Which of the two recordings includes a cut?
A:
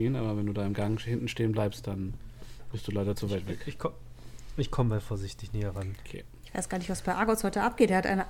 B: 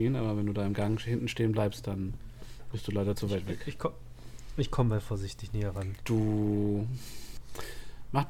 B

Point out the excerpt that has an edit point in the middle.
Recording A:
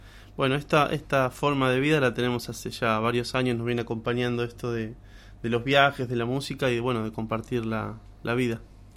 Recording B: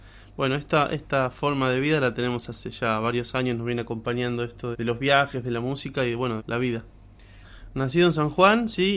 B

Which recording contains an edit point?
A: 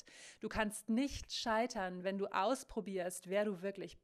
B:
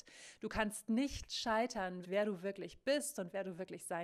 B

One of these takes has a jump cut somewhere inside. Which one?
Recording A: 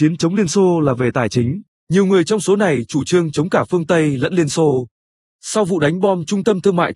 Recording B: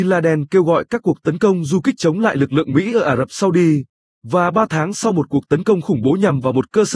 A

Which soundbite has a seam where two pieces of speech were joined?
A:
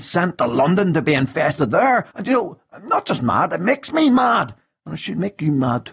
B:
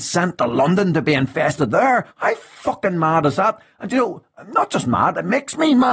A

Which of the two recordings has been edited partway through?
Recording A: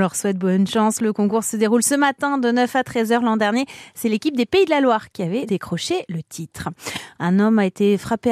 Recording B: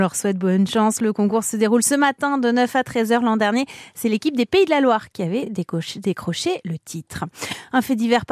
A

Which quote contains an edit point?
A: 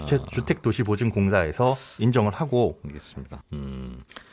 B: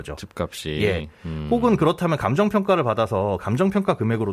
A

